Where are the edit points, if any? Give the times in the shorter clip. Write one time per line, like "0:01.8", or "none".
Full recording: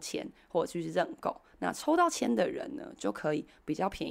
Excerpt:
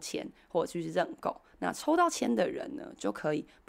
none